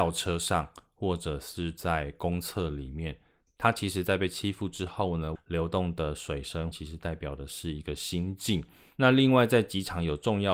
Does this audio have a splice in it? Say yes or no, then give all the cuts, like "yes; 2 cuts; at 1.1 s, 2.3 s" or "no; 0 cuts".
yes; 2 cuts; at 5.4 s, 6.7 s